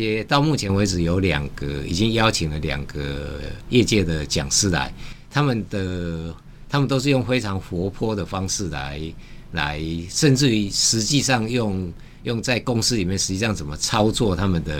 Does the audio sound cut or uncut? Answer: uncut